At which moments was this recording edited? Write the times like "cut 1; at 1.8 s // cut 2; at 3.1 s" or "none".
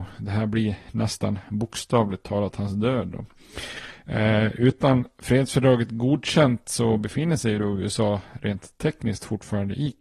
none

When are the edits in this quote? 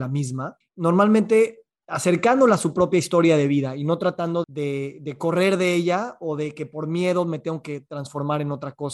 cut 1; at 4.4 s

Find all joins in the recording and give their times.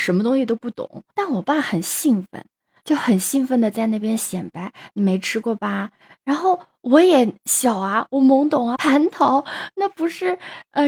cut 1; at 1.1 s // cut 2; at 4.9 s // cut 3; at 8.8 s

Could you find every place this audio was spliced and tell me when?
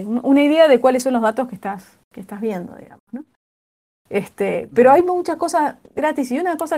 none

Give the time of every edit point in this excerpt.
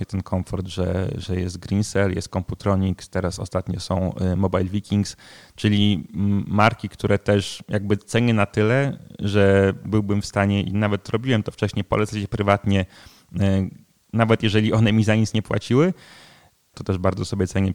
cut 1; at 16.7 s

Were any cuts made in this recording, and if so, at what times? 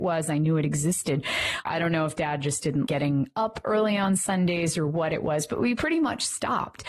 cut 1; at 1.7 s // cut 2; at 2.9 s

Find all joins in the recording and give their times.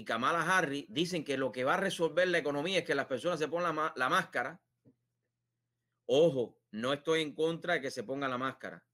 none

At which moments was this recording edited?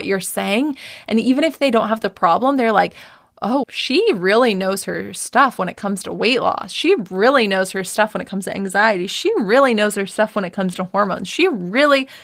cut 1; at 3.6 s

